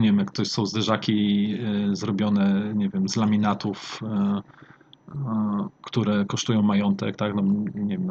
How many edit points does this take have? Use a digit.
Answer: 0